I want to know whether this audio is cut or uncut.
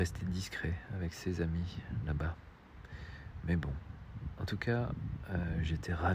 uncut